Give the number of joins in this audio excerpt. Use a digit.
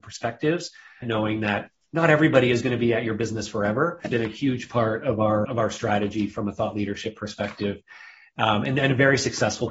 3